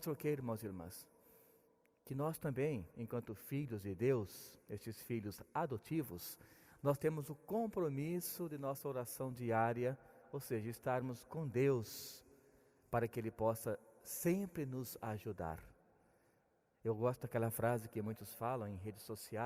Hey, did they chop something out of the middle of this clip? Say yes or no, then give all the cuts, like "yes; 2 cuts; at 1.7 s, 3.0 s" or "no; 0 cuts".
no; 0 cuts